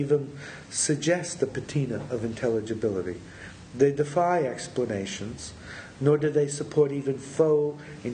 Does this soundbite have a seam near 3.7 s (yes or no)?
no